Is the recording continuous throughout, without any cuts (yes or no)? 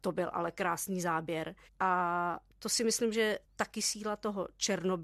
no